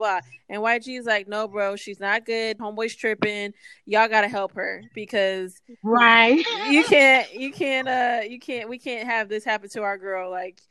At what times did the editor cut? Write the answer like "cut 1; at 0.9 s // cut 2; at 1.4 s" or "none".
cut 1; at 2.6 s